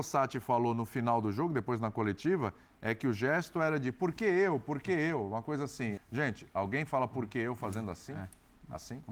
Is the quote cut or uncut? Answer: cut